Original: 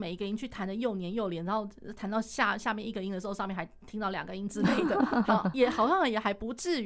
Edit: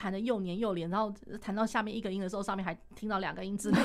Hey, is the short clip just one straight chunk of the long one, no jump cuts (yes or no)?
no